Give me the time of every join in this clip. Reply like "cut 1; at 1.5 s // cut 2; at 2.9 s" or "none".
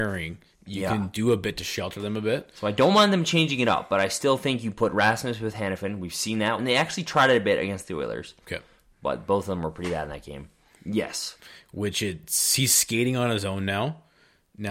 cut 1; at 6.6 s // cut 2; at 10.8 s